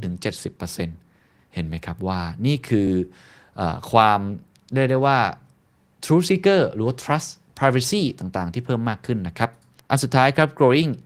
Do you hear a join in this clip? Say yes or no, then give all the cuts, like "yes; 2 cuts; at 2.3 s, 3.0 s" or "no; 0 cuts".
no; 0 cuts